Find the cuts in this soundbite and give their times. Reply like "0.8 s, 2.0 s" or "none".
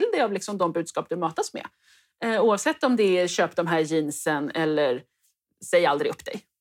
none